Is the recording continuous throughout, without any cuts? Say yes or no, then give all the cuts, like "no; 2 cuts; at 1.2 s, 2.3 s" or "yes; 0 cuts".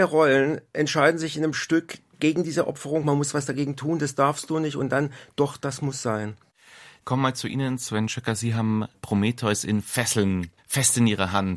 yes; 0 cuts